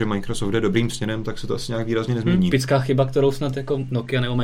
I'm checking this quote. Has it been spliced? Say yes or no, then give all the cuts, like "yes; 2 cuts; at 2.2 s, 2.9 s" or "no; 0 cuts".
yes; 1 cut; at 2.5 s